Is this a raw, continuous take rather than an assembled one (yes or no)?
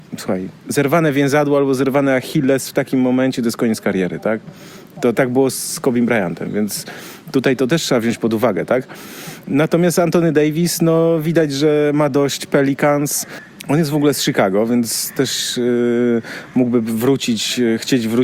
no